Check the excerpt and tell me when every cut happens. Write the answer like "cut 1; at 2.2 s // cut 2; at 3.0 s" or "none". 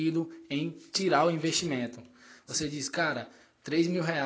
cut 1; at 2.4 s